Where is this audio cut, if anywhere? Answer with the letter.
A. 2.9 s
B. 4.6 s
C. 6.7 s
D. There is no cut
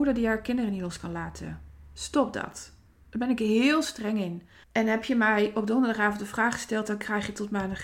B